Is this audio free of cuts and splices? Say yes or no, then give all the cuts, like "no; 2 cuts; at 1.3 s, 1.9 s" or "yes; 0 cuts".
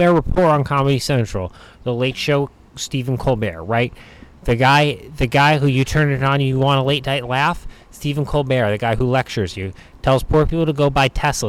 yes; 0 cuts